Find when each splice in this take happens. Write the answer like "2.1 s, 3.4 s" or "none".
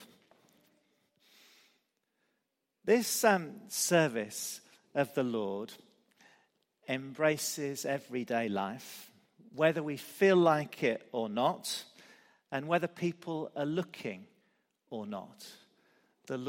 none